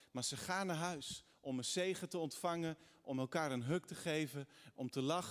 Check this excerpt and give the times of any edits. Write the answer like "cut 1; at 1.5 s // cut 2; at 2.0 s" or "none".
none